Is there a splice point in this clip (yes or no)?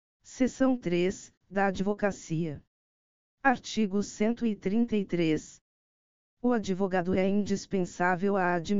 no